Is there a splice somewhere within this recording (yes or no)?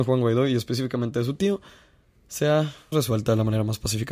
yes